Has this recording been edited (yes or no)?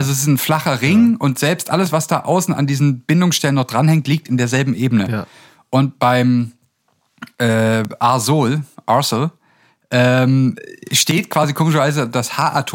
no